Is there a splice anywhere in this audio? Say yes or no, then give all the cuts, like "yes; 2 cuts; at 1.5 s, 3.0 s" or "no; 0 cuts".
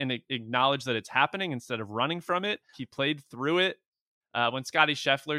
yes; 2 cuts; at 2.7 s, 4.2 s